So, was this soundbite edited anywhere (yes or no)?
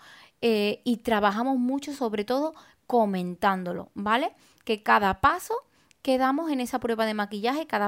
no